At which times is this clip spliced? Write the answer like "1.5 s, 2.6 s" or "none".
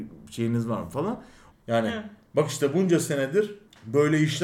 1.5 s